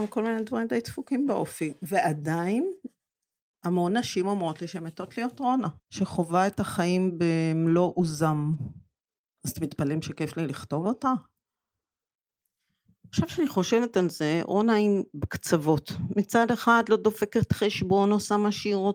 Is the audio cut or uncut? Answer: cut